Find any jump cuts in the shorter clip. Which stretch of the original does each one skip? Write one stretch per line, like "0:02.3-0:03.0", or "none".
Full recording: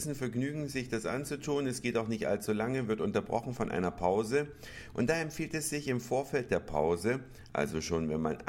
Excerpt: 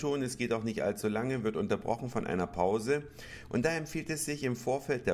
none